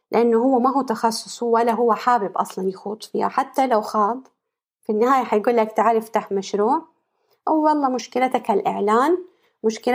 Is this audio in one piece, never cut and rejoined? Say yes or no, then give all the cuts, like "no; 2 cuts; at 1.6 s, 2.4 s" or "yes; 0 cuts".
yes; 0 cuts